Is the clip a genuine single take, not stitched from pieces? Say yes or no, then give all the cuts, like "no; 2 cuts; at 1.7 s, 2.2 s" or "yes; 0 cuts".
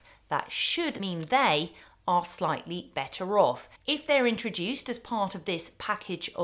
no; 2 cuts; at 1.0 s, 3.8 s